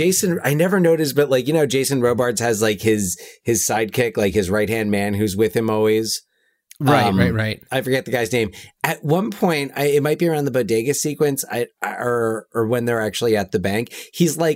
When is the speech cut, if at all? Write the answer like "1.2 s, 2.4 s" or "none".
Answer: none